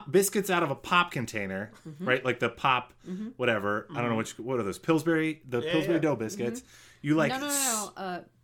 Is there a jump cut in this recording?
no; 0 cuts

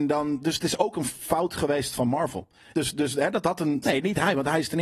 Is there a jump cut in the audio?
yes; 2 cuts; at 2.7 s, 3.8 s

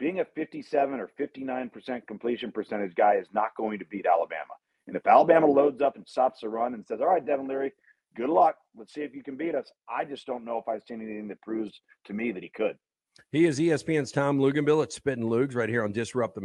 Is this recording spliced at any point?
no; 0 cuts

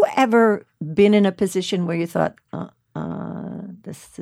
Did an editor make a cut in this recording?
no; 0 cuts

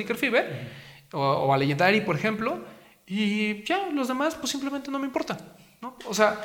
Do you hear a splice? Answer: no; 0 cuts

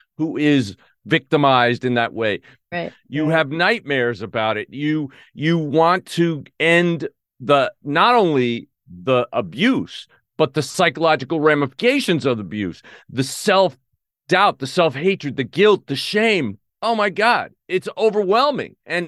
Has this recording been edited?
yes; 1 cut; at 2.7 s

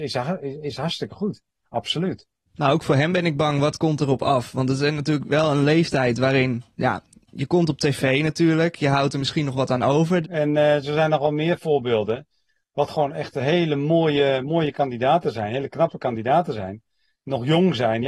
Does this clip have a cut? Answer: yes; 1 cut; at 10.2 s

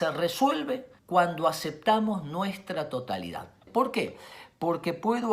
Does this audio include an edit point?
yes; 2 cuts; at 1.0 s, 3.7 s

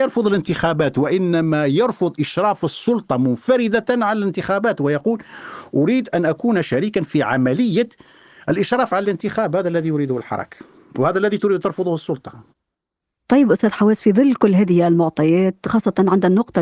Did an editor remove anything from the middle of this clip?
no; 0 cuts

